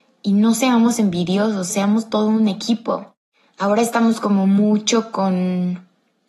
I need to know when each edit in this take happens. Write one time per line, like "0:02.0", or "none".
0:01.7